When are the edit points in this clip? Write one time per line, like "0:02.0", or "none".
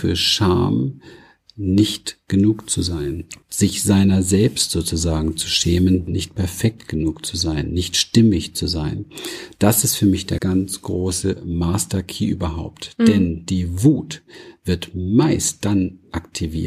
0:03.4
0:06.1
0:10.4